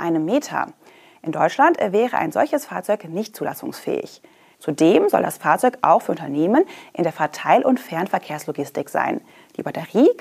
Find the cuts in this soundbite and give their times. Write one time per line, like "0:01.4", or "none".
0:04.5

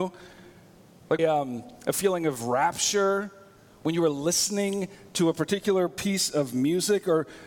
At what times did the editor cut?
0:01.2

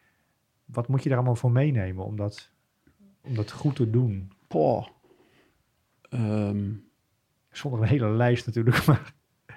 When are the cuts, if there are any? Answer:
0:03.2

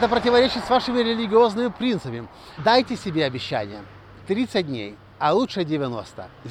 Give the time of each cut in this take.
0:02.6

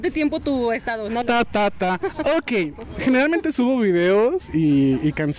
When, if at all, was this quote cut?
0:01.2

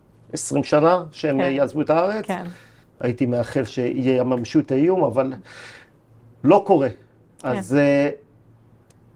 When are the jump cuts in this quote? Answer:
0:02.8

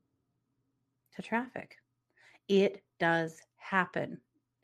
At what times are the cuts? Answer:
none

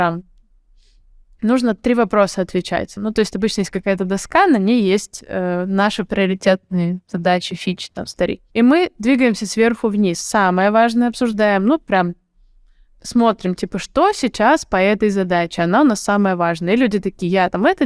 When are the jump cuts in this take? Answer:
0:03.0
0:08.5

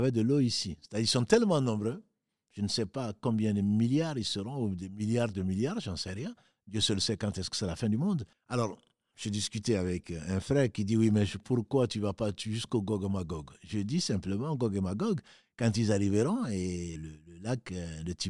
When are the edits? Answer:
0:08.3
0:17.0

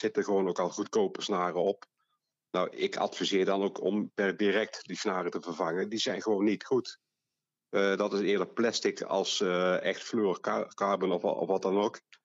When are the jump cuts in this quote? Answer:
none

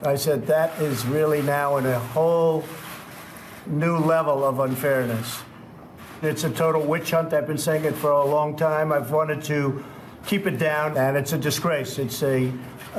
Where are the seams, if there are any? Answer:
0:06.2
0:10.9
0:12.0

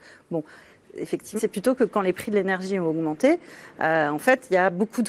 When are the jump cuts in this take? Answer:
0:01.4

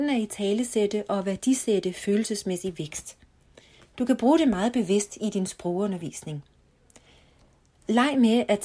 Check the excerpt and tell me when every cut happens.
none

